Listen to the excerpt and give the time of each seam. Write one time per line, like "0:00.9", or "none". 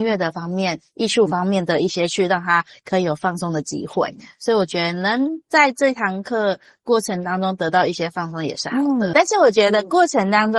0:09.1